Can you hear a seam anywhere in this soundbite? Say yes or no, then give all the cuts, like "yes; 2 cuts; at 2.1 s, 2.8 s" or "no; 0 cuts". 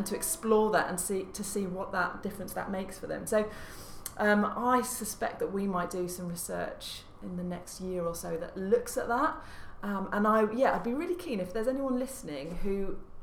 no; 0 cuts